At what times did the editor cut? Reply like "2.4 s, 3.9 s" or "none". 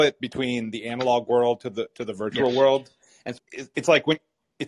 3.4 s